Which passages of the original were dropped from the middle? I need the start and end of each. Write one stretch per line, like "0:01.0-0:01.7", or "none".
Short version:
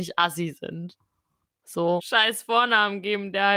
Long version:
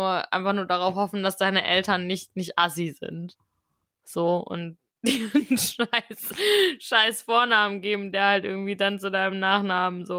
0:04.4-0:06.8